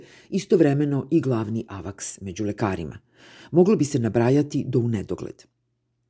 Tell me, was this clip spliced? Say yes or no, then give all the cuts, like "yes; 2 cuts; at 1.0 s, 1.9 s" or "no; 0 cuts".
no; 0 cuts